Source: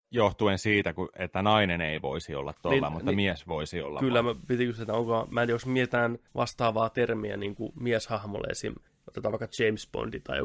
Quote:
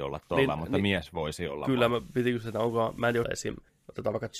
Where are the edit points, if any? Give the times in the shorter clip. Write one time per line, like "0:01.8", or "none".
0:03.2